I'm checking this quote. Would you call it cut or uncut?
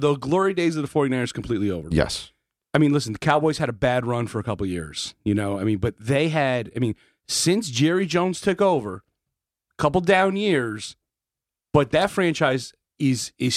uncut